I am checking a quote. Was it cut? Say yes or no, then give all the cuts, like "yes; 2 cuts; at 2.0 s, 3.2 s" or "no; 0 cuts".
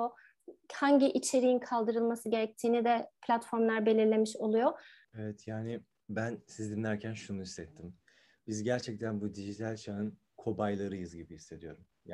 yes; 1 cut; at 5.0 s